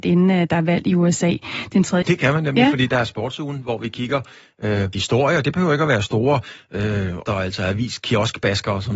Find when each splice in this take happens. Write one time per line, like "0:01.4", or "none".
0:02.0
0:04.9
0:07.3